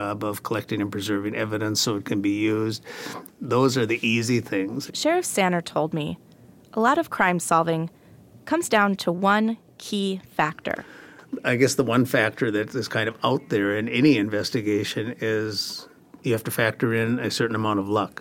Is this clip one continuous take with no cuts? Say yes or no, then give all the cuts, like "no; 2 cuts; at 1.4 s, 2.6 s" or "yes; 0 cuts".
no; 1 cut; at 4.9 s